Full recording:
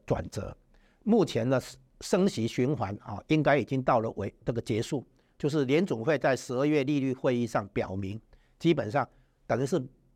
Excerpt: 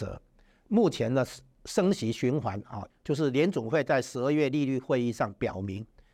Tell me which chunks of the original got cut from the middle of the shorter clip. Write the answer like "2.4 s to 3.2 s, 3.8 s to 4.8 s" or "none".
3.3 s to 5.2 s